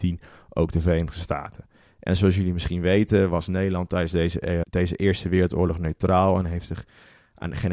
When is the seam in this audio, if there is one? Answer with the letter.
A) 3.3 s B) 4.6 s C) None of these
B